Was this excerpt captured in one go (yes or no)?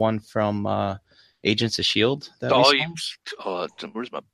yes